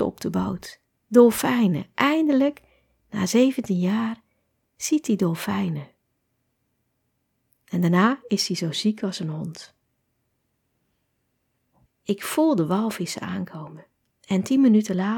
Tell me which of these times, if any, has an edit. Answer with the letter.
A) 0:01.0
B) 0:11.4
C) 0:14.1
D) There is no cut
C